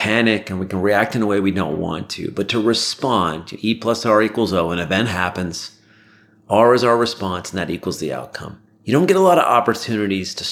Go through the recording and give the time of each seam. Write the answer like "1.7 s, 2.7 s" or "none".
8.7 s